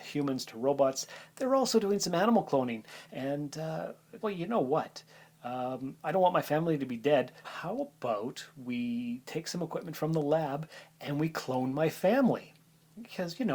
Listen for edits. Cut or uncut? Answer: cut